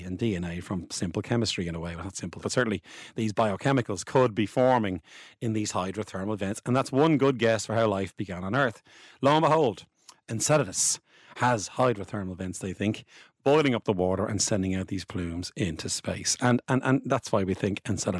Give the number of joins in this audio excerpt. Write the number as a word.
one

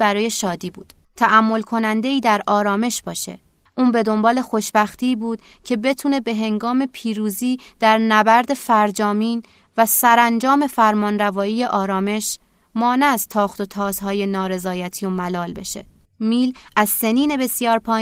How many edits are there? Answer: three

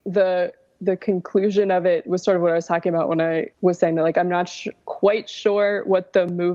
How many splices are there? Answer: one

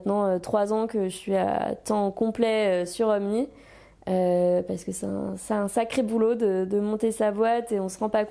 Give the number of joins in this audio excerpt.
zero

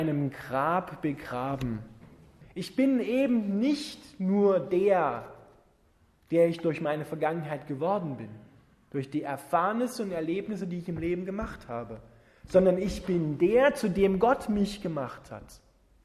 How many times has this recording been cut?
one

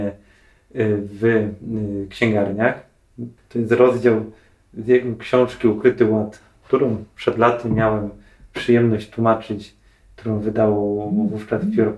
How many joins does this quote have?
one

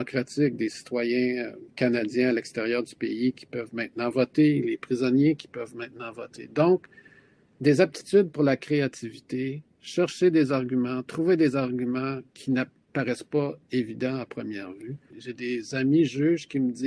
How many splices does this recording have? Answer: two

